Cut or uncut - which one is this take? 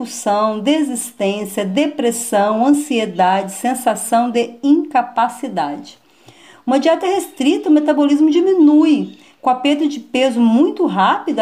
uncut